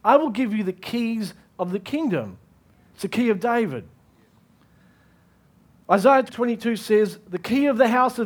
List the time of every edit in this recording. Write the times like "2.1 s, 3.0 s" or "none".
6.3 s